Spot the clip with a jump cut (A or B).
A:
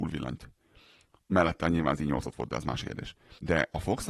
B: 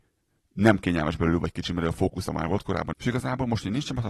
B